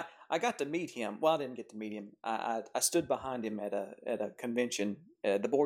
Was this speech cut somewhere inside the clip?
no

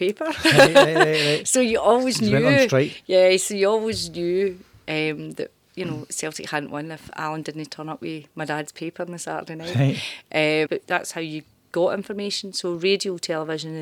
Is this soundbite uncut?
no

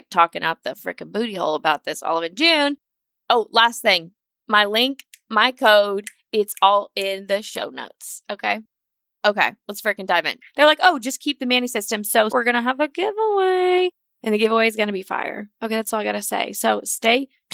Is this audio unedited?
no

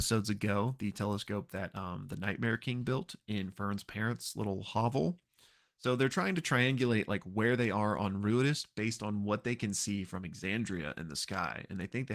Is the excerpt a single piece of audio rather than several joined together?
yes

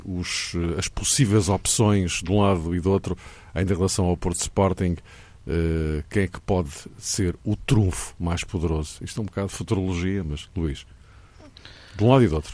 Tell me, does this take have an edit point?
no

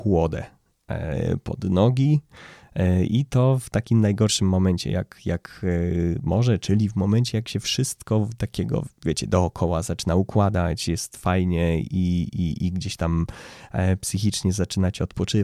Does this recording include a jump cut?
yes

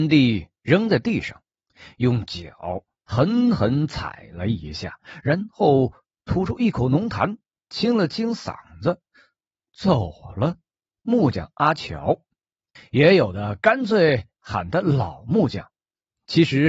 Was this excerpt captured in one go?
no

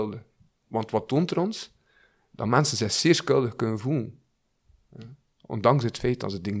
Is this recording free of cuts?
yes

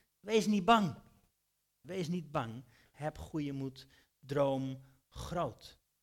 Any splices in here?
yes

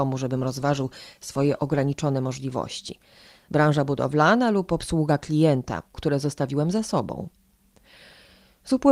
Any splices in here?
yes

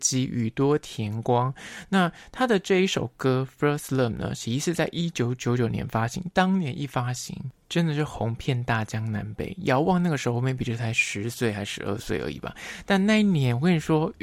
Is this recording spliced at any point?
no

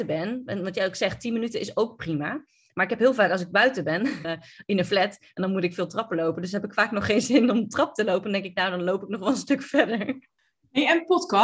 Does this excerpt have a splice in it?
yes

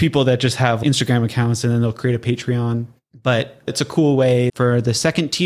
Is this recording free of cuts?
no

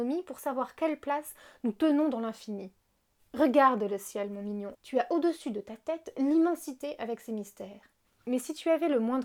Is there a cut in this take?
yes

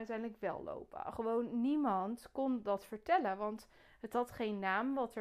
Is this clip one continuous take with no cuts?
yes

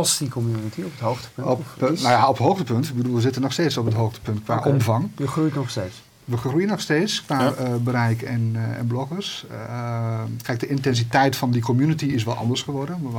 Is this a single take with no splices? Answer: yes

